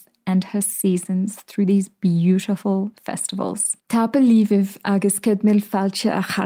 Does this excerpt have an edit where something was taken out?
yes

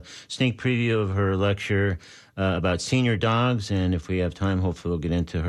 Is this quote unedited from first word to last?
yes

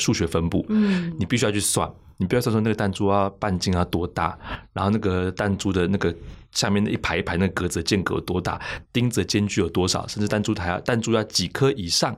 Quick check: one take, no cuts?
yes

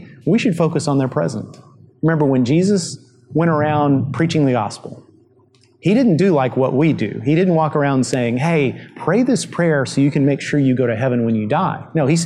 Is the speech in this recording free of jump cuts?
yes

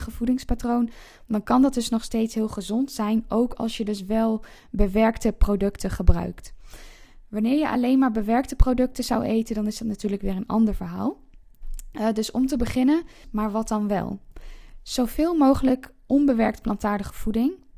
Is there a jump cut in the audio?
yes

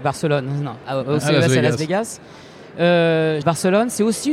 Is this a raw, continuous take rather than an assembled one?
no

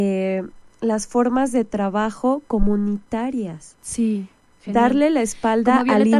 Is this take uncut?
yes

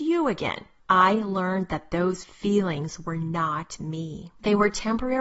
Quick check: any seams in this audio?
no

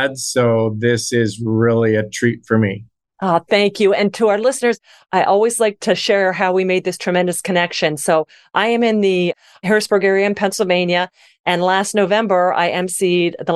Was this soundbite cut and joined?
no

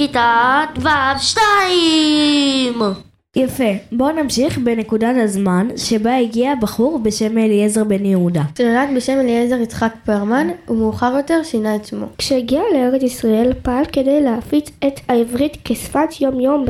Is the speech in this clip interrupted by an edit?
yes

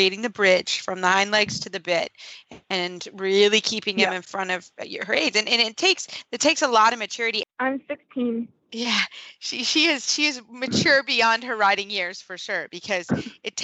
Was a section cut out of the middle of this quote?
yes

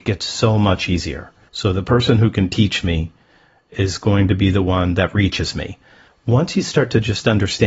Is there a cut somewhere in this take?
yes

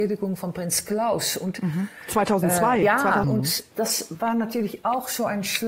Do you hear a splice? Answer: no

